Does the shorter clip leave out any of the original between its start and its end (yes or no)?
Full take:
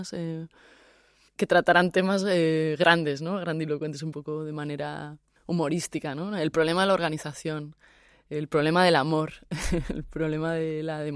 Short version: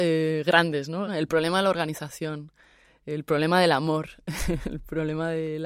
yes